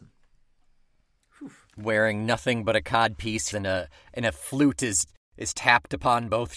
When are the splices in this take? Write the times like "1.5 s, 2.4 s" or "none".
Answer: 3.5 s